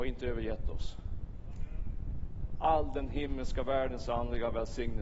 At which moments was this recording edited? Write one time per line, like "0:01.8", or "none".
none